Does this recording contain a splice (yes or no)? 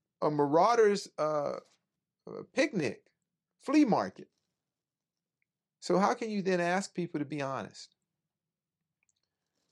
no